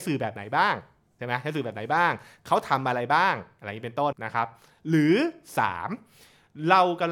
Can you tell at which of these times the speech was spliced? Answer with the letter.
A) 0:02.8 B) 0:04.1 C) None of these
B